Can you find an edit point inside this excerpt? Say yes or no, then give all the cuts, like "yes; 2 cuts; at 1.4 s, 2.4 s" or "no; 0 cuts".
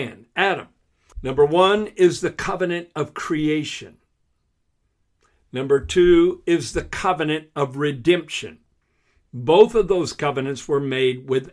yes; 1 cut; at 1.1 s